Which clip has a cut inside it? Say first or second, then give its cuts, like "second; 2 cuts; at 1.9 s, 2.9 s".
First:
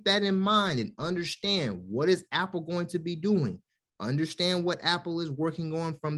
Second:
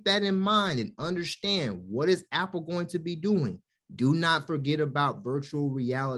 second; 1 cut; at 3.8 s